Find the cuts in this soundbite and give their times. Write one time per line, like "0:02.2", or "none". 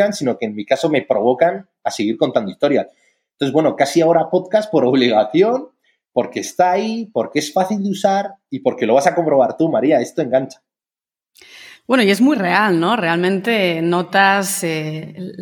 none